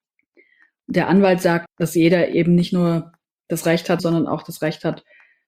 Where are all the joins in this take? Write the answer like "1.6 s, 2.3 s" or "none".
1.7 s, 4.0 s